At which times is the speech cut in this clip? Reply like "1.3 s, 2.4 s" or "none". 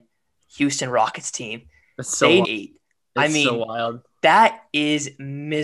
2.4 s